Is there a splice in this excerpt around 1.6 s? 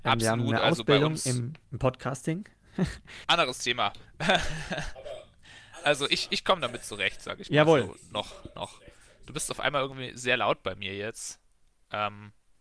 yes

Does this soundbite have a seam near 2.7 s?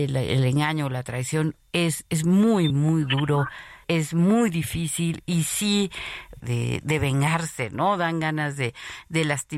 yes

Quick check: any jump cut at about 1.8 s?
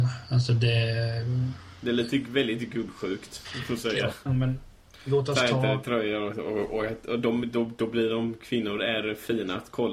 no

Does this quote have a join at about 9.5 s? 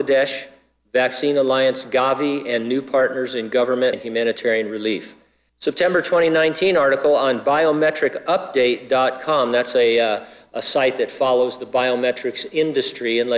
no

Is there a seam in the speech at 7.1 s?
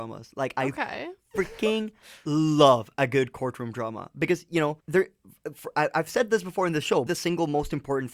yes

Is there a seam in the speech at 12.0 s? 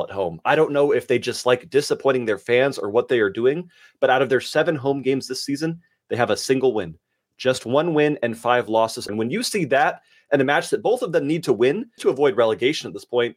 yes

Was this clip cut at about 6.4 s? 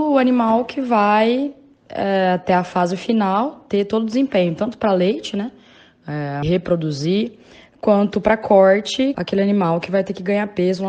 yes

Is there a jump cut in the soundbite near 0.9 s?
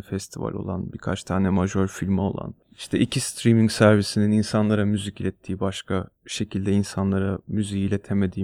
no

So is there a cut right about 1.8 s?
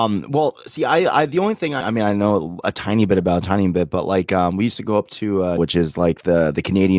yes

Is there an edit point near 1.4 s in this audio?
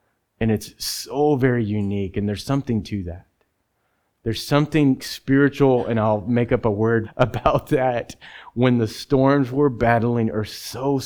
no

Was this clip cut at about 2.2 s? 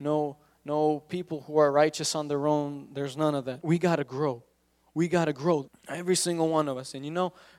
no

